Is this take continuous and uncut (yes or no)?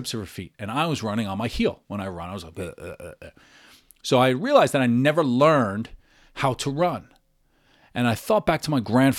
yes